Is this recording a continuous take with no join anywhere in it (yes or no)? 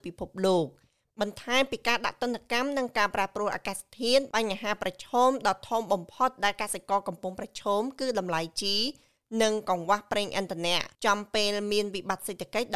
no